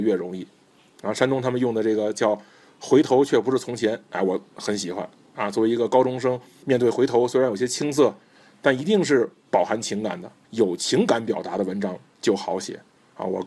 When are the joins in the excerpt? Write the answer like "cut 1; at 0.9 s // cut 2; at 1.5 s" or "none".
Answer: none